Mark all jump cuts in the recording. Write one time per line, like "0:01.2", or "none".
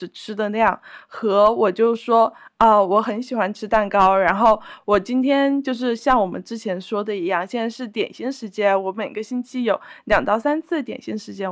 none